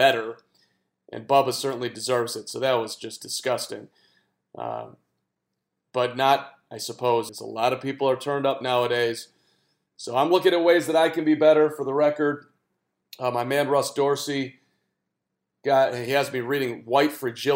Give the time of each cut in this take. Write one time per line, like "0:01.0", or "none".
0:07.3